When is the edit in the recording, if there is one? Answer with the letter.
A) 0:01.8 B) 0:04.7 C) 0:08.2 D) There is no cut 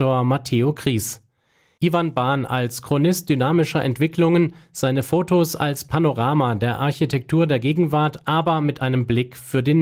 A